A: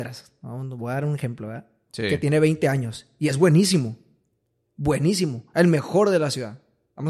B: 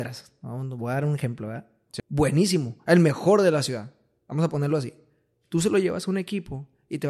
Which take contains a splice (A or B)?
B